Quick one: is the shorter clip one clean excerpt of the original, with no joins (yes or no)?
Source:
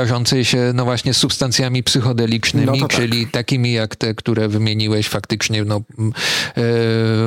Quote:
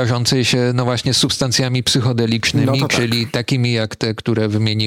yes